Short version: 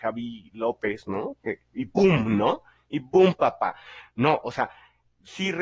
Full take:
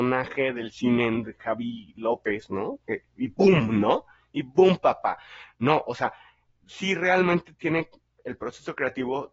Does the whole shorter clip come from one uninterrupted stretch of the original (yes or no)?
yes